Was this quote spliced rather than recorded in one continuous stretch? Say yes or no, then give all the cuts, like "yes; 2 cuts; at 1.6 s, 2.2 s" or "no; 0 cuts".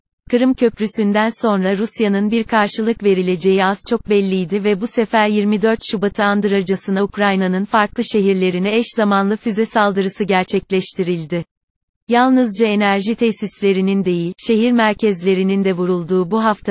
no; 0 cuts